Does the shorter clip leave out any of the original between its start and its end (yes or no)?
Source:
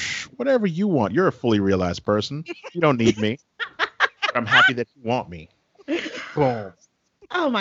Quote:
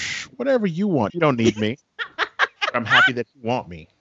yes